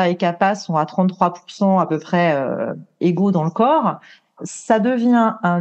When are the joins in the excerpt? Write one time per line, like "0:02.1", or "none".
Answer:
0:04.4

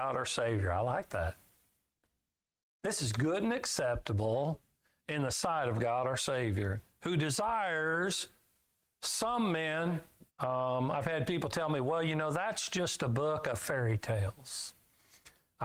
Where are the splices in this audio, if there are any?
0:10.3

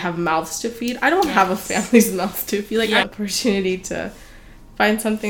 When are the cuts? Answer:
0:03.0

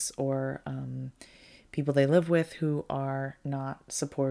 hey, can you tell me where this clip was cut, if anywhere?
none

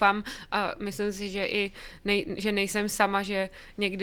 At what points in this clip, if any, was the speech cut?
none

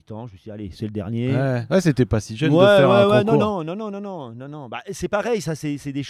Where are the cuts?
none

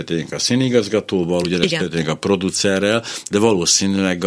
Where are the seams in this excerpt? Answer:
none

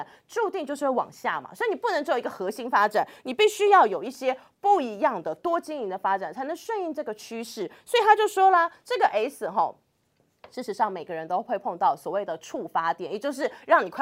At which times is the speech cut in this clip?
0:05.4

